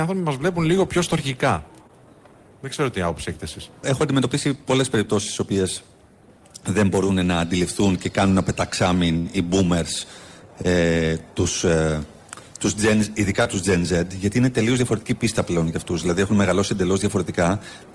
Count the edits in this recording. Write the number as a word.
one